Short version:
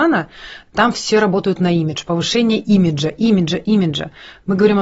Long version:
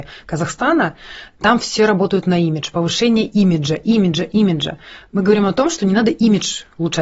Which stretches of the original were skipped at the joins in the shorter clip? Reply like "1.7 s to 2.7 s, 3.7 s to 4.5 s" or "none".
none